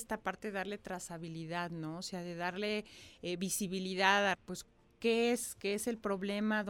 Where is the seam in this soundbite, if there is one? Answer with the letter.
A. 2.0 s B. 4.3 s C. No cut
B